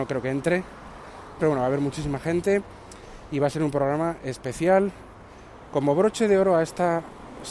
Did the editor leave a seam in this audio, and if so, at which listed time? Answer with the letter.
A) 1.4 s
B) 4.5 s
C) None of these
A